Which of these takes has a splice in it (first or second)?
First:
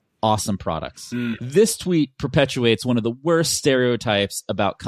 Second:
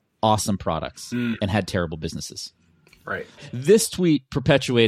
first